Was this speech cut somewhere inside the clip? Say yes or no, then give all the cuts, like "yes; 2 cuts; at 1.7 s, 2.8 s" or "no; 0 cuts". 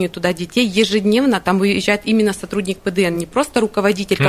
no; 0 cuts